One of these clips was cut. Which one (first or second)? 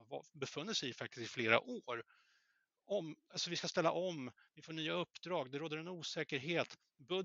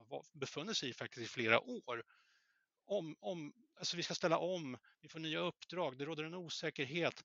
first